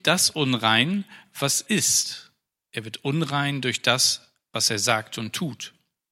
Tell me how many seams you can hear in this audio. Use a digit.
1